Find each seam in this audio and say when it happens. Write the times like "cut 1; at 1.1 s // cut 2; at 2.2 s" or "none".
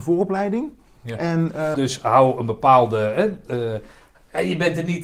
cut 1; at 1.7 s